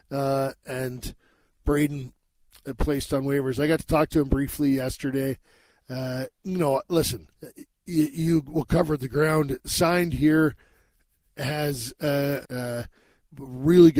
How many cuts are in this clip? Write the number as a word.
two